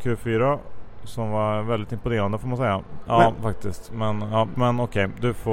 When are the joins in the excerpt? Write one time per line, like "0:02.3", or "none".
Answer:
0:03.1
0:04.5